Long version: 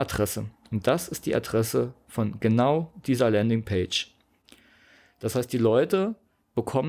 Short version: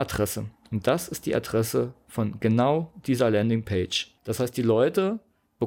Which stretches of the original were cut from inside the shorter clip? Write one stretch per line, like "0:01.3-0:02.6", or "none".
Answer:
0:04.2-0:05.1